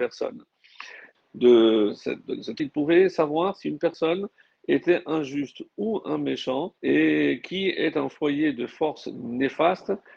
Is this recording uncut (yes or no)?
no